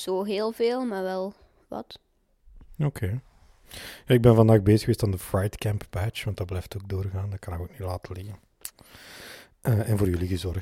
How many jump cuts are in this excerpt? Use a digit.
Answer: 0